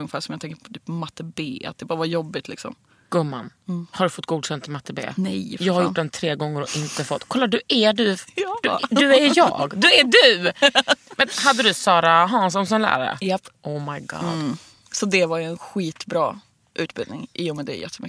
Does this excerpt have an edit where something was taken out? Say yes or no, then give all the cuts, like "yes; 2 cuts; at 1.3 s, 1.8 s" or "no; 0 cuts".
no; 0 cuts